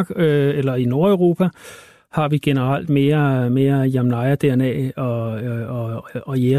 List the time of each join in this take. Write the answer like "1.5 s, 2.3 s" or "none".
none

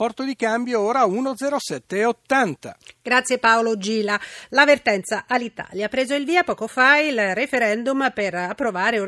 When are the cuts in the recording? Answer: none

